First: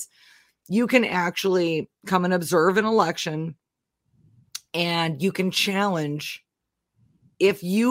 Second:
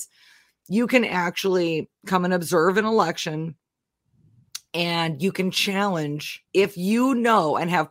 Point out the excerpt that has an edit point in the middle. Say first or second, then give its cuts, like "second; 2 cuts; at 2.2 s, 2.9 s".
second; 1 cut; at 6.5 s